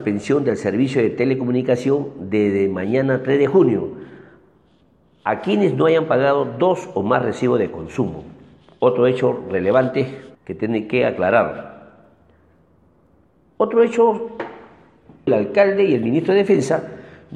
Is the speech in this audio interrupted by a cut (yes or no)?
yes